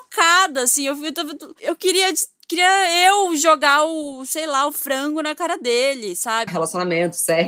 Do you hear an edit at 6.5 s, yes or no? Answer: yes